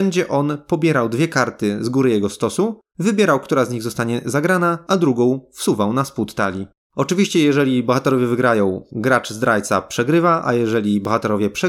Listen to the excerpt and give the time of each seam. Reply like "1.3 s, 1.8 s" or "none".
none